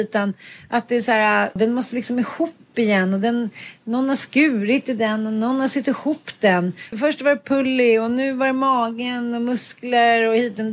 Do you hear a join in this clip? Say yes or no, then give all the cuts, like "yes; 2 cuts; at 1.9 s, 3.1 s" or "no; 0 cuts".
yes; 2 cuts; at 1.6 s, 6.9 s